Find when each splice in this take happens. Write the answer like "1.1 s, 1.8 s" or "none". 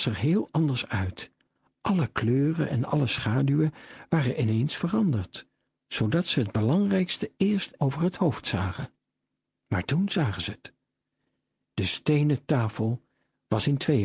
7.8 s